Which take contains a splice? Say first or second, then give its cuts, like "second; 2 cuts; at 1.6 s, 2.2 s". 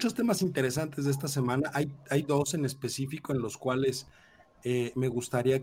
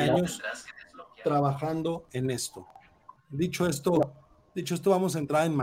second; 1 cut; at 3.2 s